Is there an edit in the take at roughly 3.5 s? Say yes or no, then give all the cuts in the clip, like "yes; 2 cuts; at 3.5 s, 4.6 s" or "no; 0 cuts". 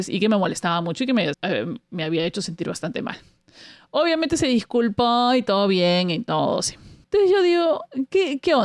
no; 2 cuts; at 1.3 s, 7.0 s